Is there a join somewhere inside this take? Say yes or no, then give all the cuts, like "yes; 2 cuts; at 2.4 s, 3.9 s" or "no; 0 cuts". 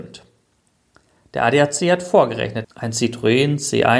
yes; 1 cut; at 2.6 s